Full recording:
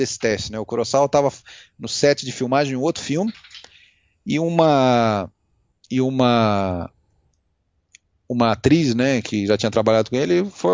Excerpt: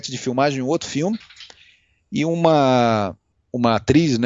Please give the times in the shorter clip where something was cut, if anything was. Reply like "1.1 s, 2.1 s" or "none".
3.3 s